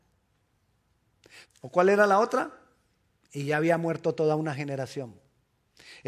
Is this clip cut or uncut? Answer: cut